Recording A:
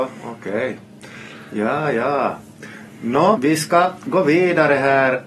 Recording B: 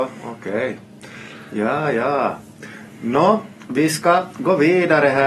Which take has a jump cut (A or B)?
A